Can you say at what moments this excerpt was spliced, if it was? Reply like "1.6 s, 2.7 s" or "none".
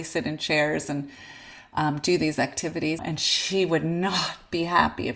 3.0 s